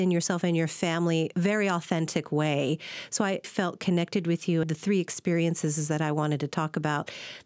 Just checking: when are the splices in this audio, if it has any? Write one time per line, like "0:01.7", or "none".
0:03.4
0:04.6